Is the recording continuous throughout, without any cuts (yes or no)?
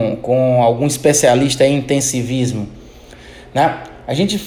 yes